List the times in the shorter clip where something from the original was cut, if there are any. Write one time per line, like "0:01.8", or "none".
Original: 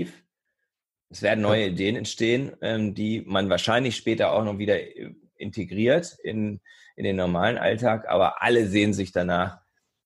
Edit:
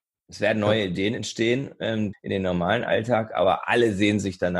0:02.1